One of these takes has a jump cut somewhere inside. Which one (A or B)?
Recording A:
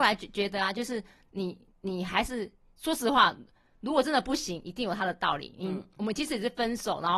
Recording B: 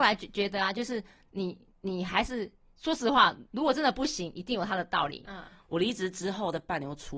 B